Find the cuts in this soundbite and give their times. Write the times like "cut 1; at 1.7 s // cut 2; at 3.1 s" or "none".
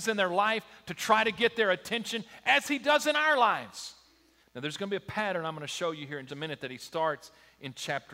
cut 1; at 4.4 s // cut 2; at 6.3 s